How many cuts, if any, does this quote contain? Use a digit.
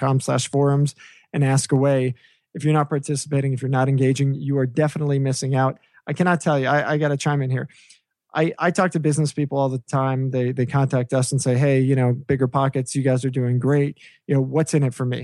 0